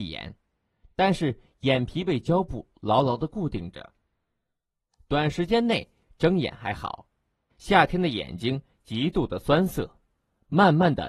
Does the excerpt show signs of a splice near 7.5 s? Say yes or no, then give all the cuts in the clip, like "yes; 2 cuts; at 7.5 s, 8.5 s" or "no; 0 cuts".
yes; 1 cut; at 7.5 s